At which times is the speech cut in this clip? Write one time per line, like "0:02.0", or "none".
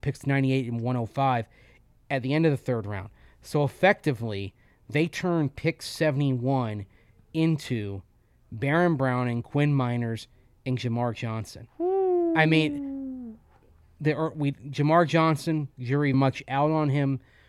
0:16.1

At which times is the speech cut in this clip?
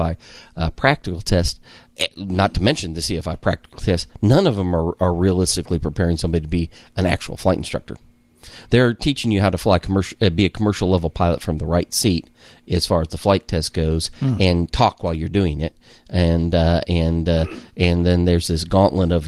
none

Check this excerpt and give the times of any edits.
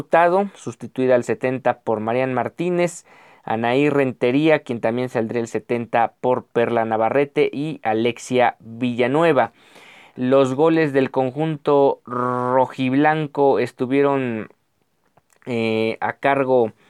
none

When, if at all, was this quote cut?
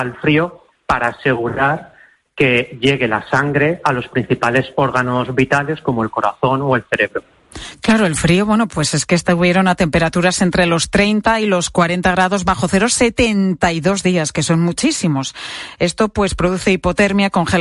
none

